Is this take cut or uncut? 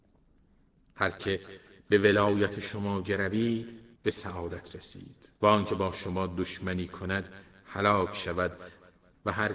cut